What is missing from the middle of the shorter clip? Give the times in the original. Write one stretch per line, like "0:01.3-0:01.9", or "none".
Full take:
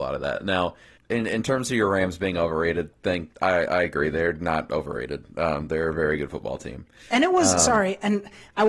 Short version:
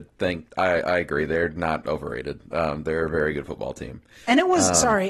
none